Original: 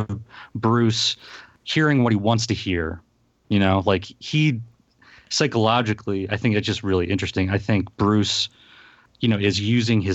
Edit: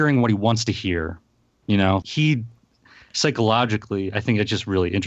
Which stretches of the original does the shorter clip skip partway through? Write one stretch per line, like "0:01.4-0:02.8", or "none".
0:03.8-0:04.2